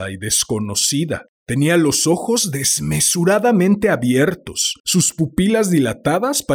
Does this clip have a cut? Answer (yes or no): yes